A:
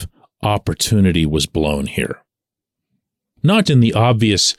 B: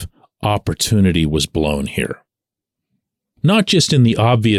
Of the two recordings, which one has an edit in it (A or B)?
A